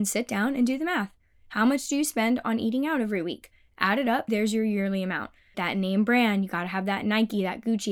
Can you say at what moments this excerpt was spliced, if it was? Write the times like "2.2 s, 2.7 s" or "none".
4.3 s, 5.5 s